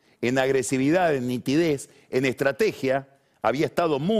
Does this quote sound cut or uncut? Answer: uncut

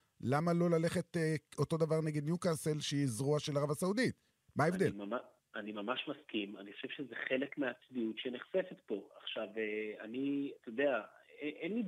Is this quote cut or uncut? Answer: uncut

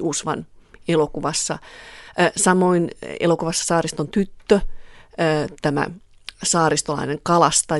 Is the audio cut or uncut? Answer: uncut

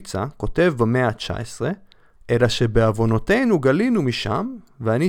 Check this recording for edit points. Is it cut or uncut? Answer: cut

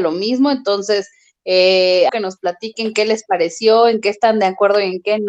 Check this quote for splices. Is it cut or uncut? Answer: cut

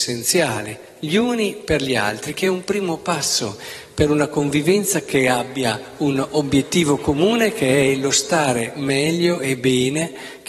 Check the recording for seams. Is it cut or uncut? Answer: uncut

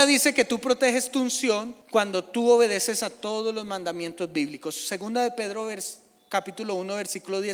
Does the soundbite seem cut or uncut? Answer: cut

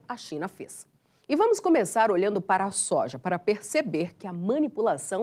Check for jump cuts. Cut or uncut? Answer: uncut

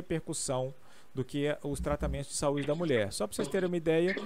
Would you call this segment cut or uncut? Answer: uncut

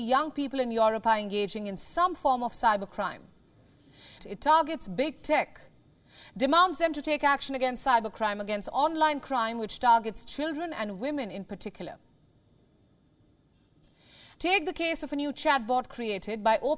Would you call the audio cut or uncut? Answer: cut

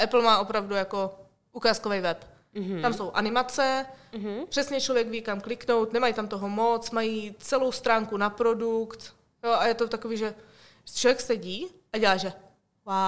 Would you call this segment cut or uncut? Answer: uncut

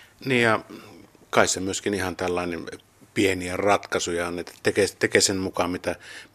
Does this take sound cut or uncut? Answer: uncut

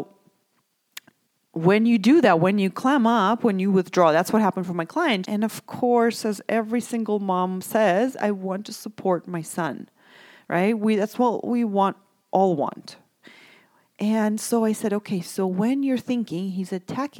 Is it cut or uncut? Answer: cut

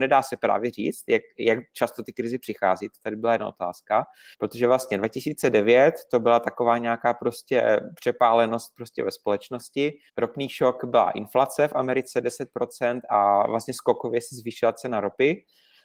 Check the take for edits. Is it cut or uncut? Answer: cut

